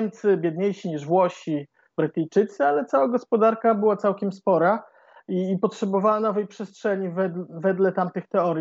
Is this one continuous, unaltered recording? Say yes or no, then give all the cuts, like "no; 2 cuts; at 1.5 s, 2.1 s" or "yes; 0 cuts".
yes; 0 cuts